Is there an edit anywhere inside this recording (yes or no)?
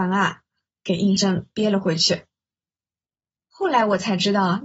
yes